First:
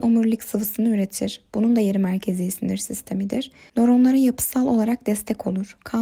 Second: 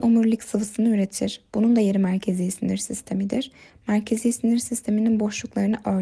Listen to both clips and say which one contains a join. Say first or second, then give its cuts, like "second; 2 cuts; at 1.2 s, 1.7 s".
first; 1 cut; at 3.7 s